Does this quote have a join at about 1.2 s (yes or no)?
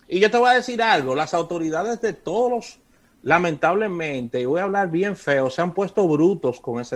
no